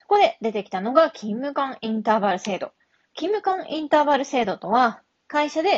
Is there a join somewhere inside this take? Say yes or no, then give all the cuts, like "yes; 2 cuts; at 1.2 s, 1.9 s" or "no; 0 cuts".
no; 0 cuts